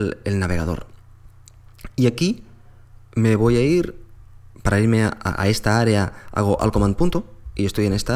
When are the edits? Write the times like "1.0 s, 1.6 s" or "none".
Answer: none